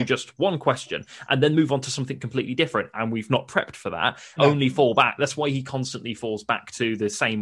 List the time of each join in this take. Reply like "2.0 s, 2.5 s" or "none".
2.9 s, 4.4 s

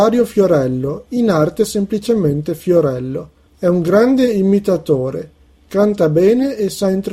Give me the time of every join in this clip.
3.5 s

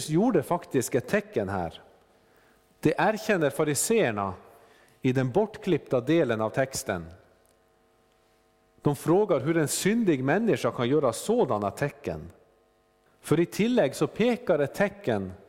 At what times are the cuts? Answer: 13.1 s

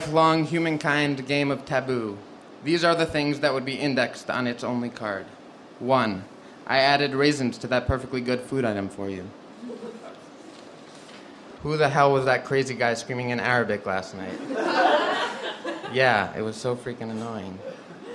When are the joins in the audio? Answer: 11.6 s

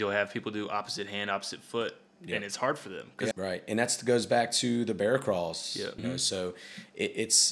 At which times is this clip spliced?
3.3 s, 6.0 s

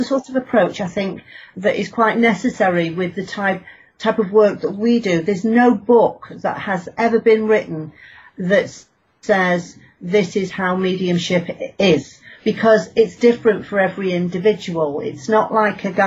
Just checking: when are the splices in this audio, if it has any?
none

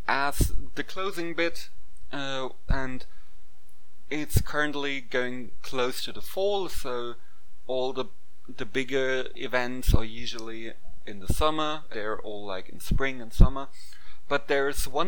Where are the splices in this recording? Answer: 2.7 s, 11.9 s

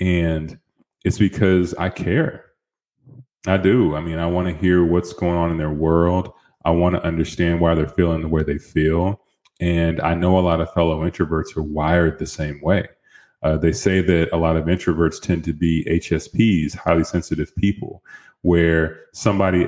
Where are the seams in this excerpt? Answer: none

